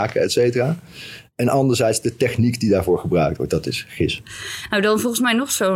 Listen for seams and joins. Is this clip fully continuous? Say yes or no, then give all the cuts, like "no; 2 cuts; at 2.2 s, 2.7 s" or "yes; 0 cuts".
yes; 0 cuts